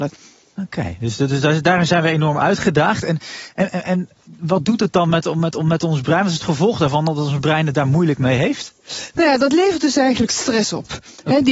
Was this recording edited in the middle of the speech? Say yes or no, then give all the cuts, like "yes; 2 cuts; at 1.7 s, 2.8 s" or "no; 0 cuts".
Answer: no; 0 cuts